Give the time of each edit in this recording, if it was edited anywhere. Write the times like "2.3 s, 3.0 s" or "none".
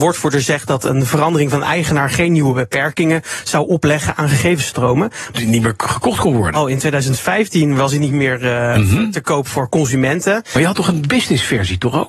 5.3 s